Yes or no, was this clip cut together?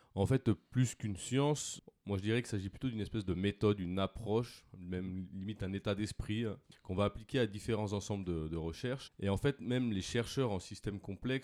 yes